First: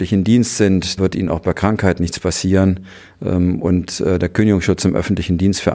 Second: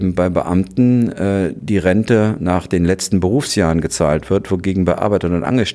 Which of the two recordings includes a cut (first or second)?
first